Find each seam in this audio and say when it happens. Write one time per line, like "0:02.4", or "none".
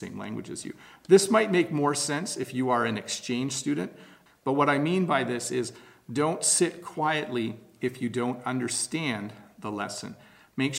0:04.3

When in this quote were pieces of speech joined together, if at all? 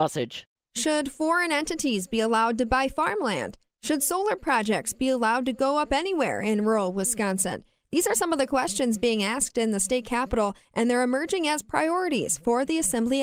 none

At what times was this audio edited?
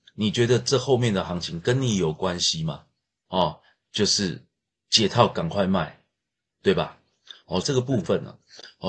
0:03.3
0:07.6

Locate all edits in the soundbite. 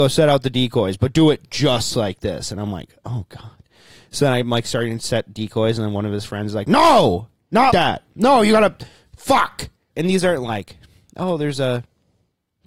0:07.7
0:09.9

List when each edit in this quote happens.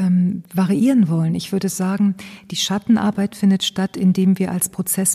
none

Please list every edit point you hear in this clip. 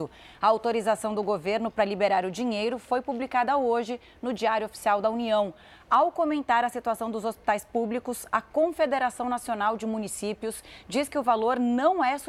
none

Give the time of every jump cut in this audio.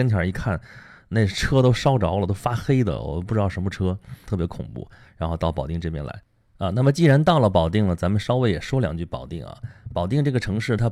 0:04.3

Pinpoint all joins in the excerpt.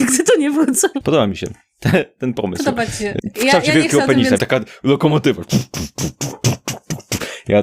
0:01.0
0:04.4

